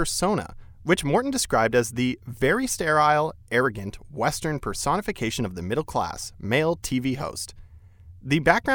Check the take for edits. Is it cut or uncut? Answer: uncut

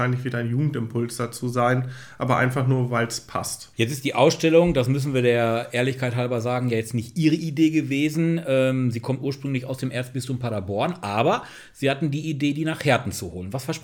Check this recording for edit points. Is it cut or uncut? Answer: cut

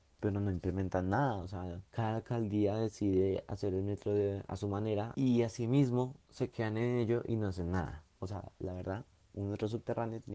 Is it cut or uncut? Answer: cut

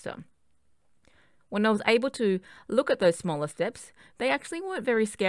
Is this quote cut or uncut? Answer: uncut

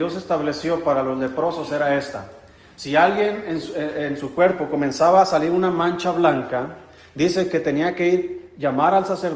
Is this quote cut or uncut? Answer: uncut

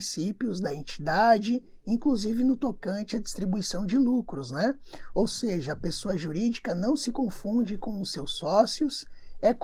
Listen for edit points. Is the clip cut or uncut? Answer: uncut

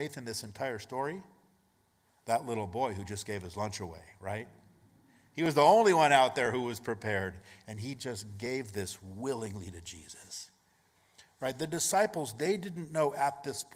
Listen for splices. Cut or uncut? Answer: uncut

